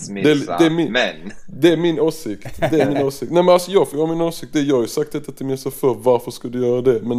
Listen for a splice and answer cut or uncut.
uncut